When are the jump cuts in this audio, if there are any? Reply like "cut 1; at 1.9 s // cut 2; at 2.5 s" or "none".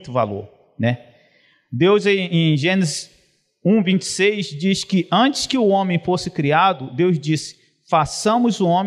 none